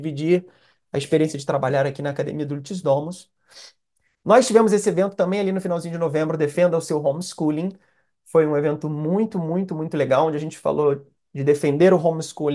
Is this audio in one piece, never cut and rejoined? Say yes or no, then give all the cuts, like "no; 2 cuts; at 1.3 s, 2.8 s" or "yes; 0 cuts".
yes; 0 cuts